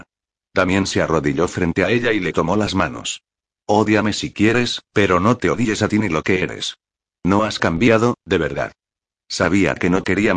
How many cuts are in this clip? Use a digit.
1